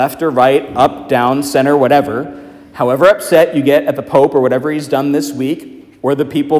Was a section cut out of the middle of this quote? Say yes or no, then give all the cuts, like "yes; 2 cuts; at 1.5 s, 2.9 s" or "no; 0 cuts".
no; 0 cuts